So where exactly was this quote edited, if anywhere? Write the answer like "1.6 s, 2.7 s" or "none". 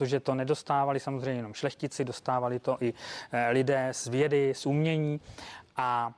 none